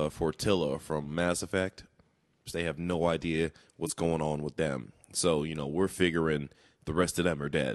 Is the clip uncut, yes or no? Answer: no